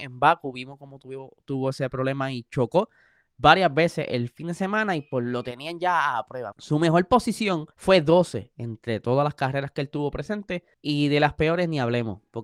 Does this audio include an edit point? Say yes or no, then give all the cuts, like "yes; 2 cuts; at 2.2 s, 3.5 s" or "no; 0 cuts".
yes; 3 cuts; at 6.5 s, 7.7 s, 10.7 s